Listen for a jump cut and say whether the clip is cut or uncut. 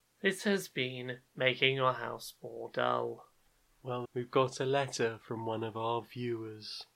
cut